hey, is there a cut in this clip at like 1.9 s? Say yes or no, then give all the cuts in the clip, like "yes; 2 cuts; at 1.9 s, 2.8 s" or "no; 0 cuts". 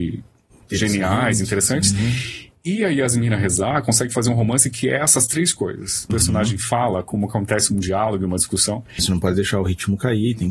no; 2 cuts; at 6.1 s, 9.0 s